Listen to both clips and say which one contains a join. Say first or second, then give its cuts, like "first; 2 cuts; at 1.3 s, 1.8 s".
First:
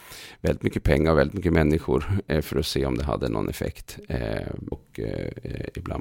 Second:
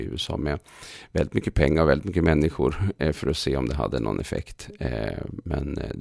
first; 1 cut; at 4.7 s